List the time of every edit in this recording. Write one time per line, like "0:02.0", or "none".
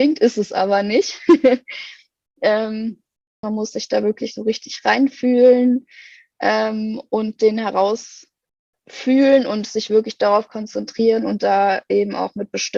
0:03.4